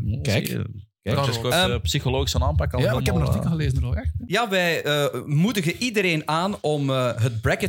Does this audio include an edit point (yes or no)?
no